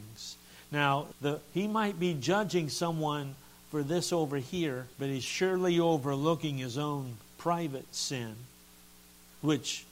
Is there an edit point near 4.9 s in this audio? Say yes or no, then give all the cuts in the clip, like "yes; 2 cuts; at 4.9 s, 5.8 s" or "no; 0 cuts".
yes; 2 cuts; at 1.1 s, 4.9 s